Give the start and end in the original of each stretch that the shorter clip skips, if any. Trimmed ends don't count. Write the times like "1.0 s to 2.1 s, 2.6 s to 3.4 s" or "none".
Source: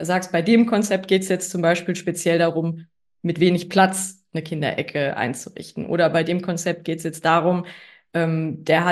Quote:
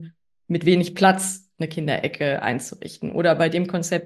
none